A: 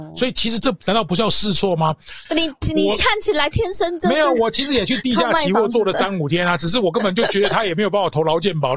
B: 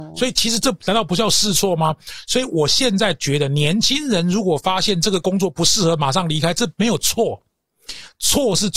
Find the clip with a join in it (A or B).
A